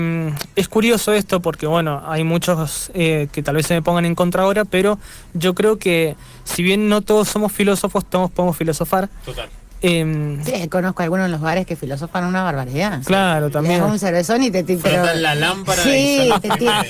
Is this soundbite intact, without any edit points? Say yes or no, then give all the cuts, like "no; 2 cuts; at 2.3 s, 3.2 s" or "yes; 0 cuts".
yes; 0 cuts